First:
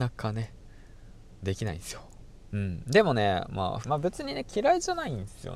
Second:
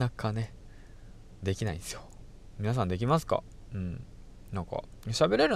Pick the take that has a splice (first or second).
first